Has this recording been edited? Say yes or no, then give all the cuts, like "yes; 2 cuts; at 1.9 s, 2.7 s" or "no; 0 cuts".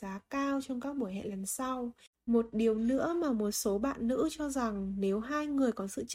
yes; 1 cut; at 2.2 s